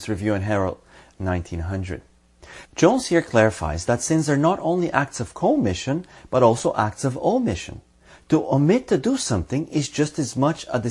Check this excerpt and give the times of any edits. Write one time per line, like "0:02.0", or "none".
0:01.1